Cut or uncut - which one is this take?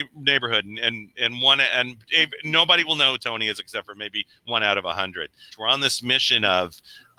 cut